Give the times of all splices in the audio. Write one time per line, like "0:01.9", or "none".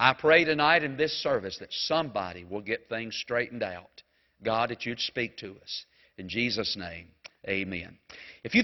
0:06.0

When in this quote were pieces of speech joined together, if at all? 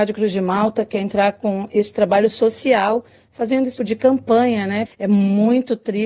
0:03.8
0:04.9

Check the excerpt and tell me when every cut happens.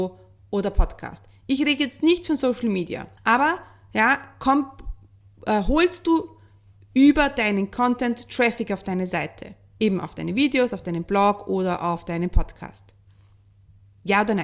0:03.2

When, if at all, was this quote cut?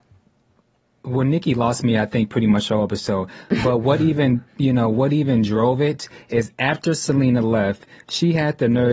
none

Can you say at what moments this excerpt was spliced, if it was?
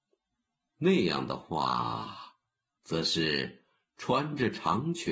0:02.8

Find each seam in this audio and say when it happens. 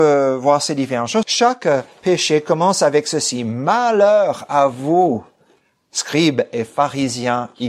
0:01.2

